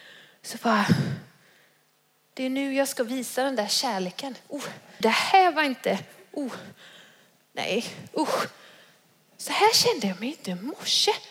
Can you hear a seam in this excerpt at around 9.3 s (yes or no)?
no